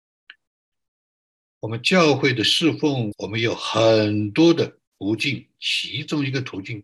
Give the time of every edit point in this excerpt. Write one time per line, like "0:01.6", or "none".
0:03.1
0:04.9

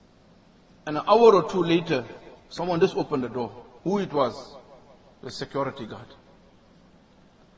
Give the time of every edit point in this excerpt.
0:02.4
0:03.8

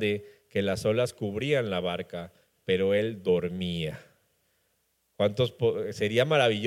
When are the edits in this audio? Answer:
none

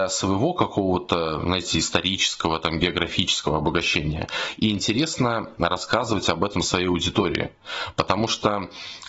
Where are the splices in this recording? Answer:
none

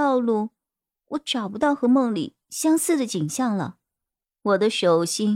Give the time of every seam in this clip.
0:04.2

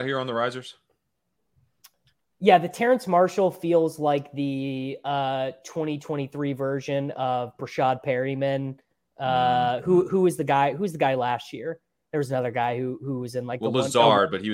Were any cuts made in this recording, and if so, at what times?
none

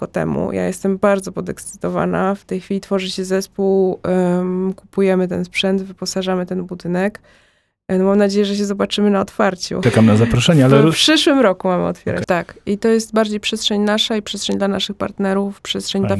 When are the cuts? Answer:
0:09.8
0:12.2

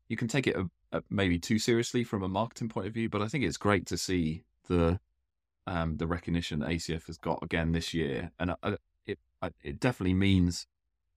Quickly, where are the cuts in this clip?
none

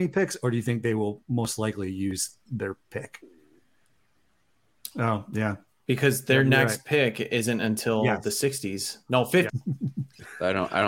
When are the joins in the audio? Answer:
0:04.9
0:09.5

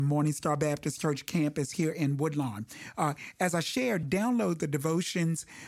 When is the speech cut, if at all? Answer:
0:04.0

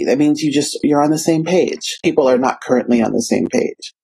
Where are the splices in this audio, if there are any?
0:02.0

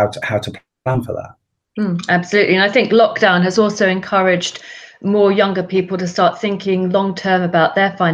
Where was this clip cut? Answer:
none

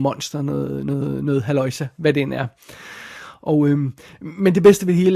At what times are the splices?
none

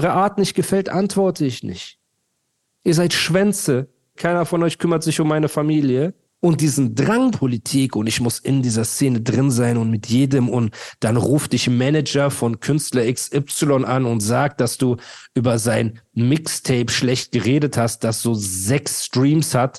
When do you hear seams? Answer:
0:04.2
0:06.3
0:07.3

